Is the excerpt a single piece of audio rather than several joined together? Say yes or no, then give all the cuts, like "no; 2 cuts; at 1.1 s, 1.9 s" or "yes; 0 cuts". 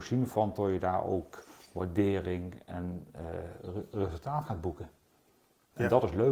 yes; 0 cuts